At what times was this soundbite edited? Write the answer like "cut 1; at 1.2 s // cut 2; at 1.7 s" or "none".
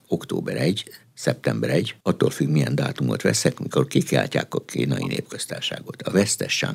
cut 1; at 2.0 s